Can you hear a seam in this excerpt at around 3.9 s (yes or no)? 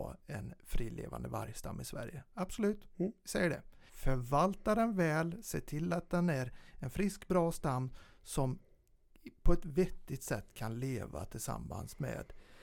yes